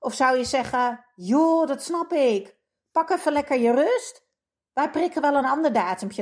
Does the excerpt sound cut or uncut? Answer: uncut